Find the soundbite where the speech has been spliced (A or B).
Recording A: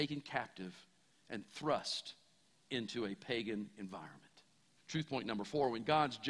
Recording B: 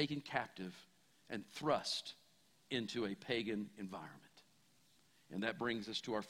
A